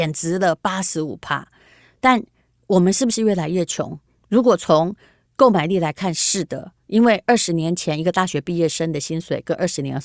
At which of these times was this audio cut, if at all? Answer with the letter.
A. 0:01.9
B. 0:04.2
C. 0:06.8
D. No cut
D